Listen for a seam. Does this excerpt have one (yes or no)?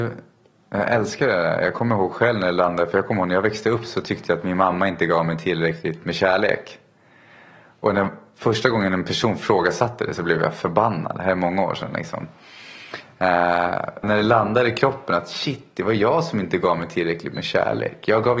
yes